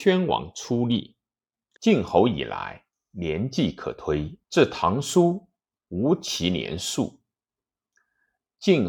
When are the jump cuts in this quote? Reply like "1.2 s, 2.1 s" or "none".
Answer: 1.8 s, 4.5 s, 5.8 s